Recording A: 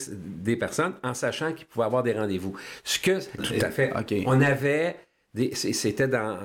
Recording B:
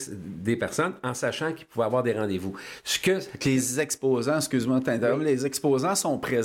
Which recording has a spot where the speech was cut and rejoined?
A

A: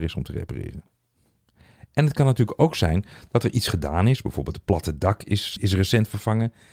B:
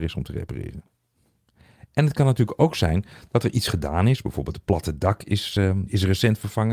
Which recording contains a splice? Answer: A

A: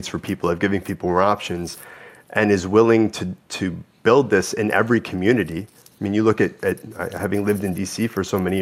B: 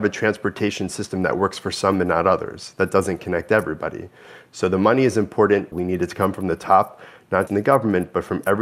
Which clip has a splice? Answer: B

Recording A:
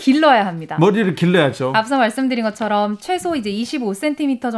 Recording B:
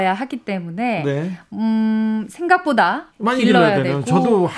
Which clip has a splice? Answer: B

